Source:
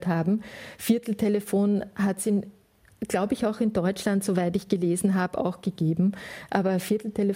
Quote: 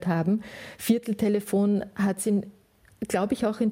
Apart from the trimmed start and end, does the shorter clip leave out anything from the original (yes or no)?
no